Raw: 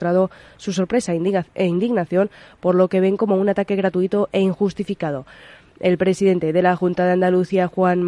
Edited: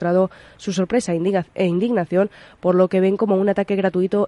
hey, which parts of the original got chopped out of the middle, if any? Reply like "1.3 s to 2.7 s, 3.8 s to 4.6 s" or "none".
none